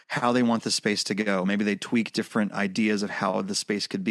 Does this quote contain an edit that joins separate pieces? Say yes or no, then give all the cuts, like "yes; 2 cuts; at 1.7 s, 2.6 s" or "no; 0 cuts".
no; 0 cuts